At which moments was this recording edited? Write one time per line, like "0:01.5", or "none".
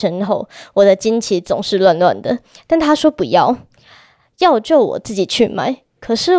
none